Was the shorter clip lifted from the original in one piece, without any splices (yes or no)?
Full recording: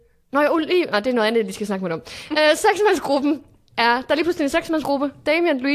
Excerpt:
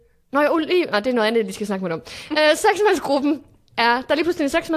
yes